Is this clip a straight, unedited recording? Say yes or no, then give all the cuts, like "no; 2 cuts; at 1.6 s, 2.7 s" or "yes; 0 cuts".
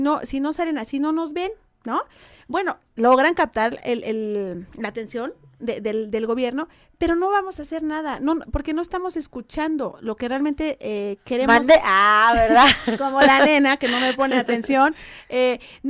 yes; 0 cuts